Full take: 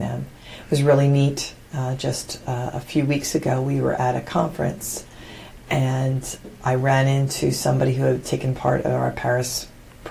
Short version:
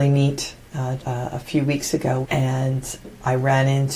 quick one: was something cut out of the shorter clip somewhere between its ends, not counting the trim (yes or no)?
yes